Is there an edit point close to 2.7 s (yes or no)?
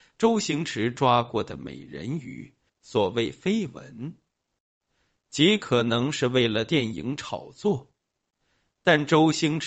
yes